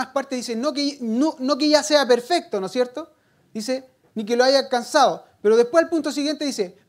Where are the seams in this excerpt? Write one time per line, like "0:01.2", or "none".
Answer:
none